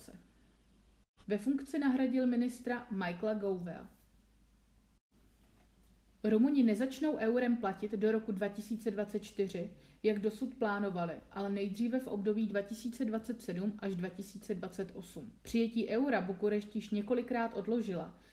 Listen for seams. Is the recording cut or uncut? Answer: cut